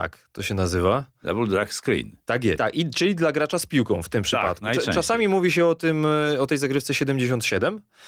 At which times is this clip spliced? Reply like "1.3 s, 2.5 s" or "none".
2.6 s